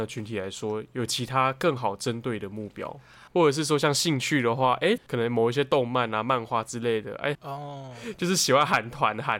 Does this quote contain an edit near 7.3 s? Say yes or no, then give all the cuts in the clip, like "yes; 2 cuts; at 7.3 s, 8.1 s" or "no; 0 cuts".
yes; 3 cuts; at 3.3 s, 5.0 s, 7.3 s